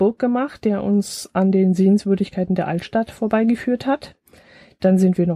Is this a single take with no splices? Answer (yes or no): yes